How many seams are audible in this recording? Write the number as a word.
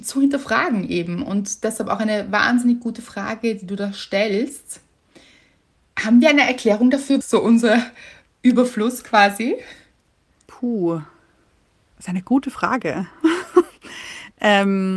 one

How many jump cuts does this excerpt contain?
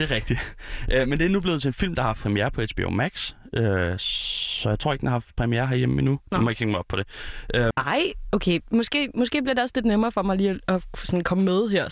one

